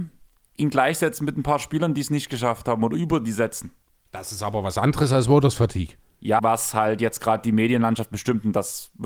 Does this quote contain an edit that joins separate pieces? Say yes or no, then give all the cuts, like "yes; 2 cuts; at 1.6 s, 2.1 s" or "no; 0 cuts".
yes; 1 cut; at 6.4 s